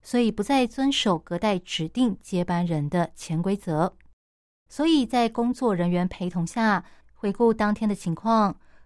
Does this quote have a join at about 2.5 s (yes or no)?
no